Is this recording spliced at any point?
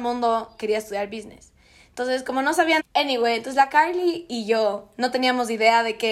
yes; 1 cut; at 2.8 s

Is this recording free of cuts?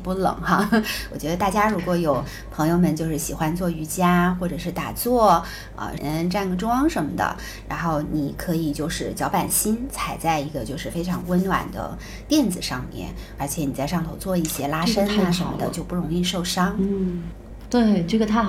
no; 2 cuts; at 6.0 s, 13.4 s

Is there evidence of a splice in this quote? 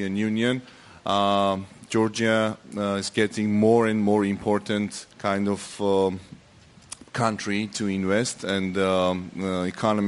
yes; 1 cut; at 5.1 s

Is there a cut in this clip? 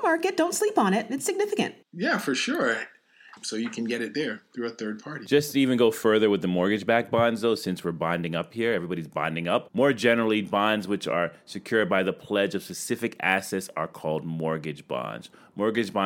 yes; 3 cuts; at 1.8 s, 3.4 s, 9.7 s

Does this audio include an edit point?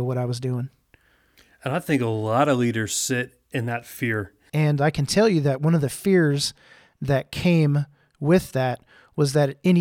yes; 1 cut; at 4.5 s

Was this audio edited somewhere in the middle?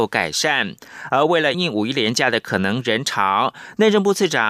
yes; 1 cut; at 1.5 s

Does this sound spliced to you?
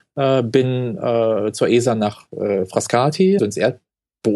yes; 1 cut; at 3.4 s

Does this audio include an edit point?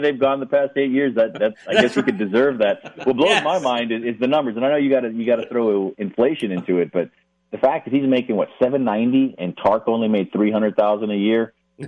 no; 0 cuts

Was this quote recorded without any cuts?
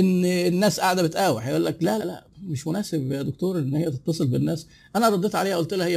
no; 1 cut; at 2.0 s

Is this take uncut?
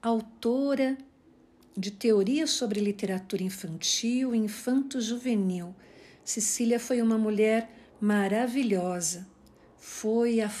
yes; 0 cuts

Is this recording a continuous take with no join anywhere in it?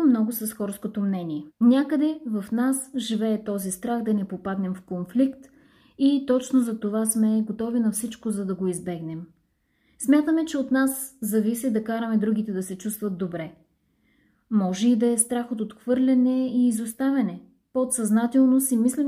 no; 1 cut; at 1.5 s

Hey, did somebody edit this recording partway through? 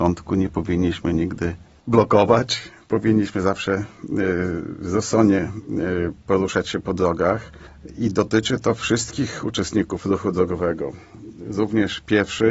no; 0 cuts

